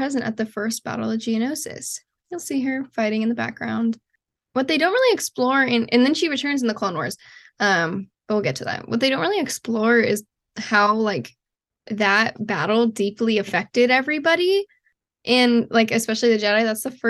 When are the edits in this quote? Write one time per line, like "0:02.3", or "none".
none